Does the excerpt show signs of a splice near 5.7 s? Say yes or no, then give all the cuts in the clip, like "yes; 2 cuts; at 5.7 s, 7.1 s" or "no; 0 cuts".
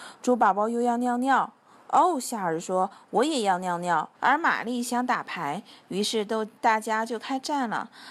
no; 1 cut; at 4.1 s